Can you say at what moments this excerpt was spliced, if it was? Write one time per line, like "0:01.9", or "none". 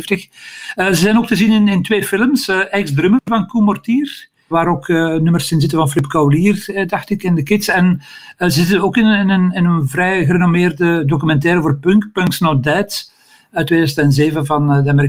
0:04.5